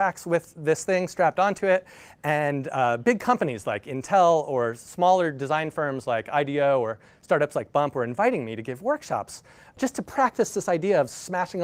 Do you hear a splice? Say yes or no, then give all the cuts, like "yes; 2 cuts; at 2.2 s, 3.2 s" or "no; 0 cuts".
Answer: no; 0 cuts